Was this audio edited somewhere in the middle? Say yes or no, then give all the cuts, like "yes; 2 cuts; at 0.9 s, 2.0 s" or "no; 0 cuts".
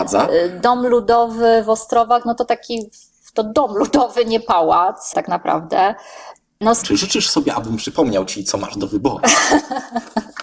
yes; 1 cut; at 6.8 s